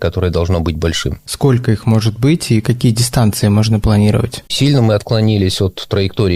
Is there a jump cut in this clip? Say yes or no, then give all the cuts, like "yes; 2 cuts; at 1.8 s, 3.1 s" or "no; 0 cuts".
yes; 2 cuts; at 1.3 s, 4.5 s